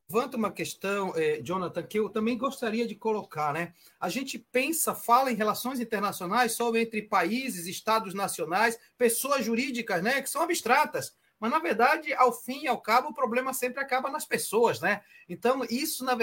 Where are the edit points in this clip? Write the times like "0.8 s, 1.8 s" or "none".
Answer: none